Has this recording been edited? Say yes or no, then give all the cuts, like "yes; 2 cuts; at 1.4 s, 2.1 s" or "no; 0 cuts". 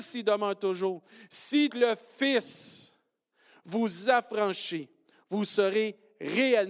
yes; 1 cut; at 1.7 s